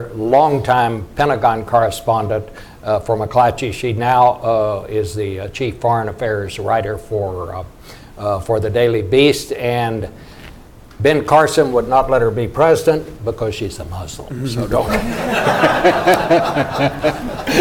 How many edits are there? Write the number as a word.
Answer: zero